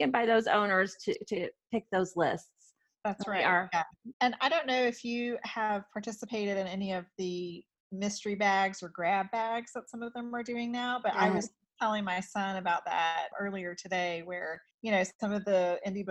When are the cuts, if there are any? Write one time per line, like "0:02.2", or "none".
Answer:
0:04.1
0:13.3
0:14.7